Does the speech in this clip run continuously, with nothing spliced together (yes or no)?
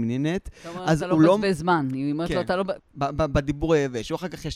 no